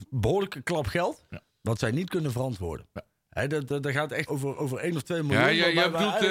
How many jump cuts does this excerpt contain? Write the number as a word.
one